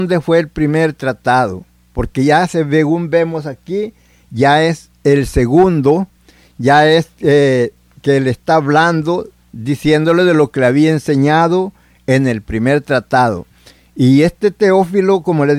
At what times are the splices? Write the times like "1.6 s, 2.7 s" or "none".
none